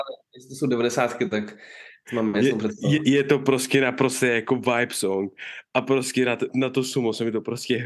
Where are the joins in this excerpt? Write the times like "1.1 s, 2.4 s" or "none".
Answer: 3.0 s, 6.5 s

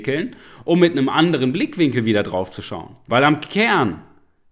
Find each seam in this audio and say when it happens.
3.1 s

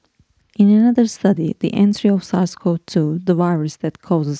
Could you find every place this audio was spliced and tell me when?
none

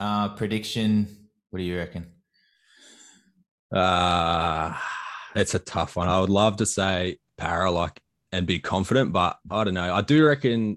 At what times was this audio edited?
none

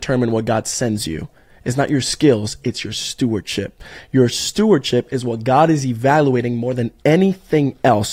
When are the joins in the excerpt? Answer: none

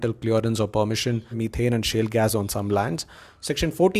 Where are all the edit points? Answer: 1.3 s

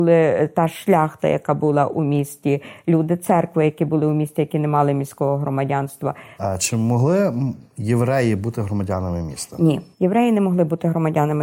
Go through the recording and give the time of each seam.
6.4 s, 9.9 s

